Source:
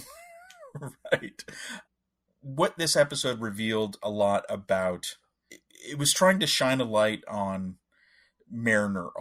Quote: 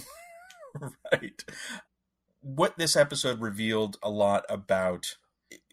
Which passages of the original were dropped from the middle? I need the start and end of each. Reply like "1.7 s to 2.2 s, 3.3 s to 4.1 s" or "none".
none